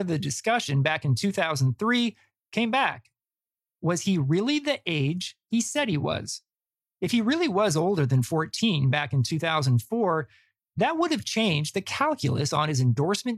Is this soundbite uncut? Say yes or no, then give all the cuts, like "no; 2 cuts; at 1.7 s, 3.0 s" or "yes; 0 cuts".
yes; 0 cuts